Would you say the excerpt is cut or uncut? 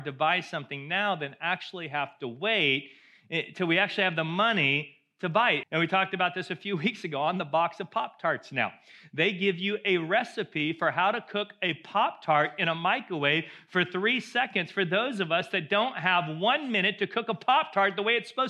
cut